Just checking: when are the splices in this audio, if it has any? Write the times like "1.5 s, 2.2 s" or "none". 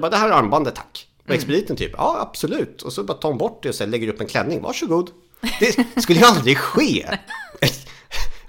7.3 s